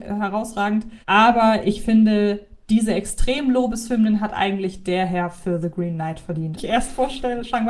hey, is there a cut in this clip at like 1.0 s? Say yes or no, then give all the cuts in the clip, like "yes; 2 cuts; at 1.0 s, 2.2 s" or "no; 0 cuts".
yes; 2 cuts; at 1.0 s, 6.6 s